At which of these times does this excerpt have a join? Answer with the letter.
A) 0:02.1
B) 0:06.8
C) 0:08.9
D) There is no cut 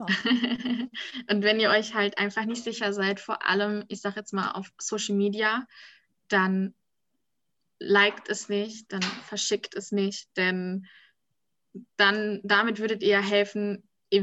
C